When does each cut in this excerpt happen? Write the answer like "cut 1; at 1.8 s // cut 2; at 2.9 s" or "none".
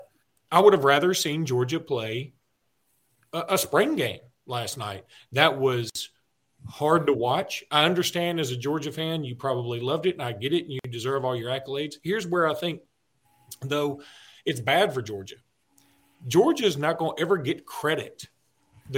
none